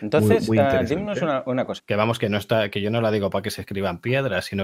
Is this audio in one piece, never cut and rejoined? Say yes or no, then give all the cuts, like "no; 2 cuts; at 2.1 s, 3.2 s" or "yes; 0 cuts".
no; 1 cut; at 1.8 s